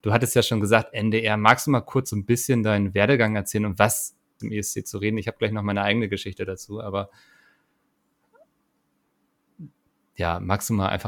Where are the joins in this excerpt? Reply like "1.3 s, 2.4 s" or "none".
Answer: 4.4 s